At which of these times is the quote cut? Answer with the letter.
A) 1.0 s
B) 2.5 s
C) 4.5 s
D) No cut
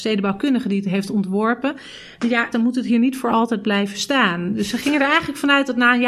B